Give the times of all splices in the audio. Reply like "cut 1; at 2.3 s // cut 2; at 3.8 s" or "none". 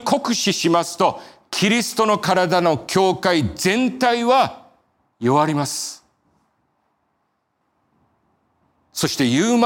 none